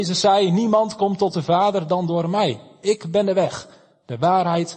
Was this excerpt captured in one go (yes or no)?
yes